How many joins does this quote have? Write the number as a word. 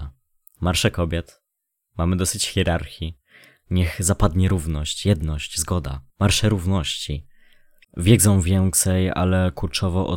two